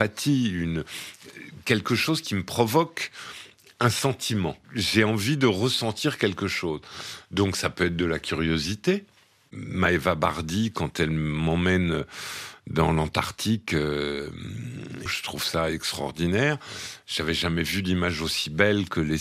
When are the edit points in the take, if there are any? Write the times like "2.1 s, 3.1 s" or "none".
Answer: 4.6 s, 15.1 s